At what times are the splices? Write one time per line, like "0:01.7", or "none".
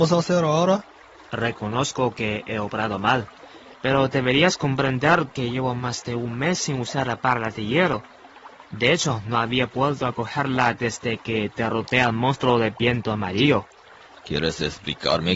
0:14.1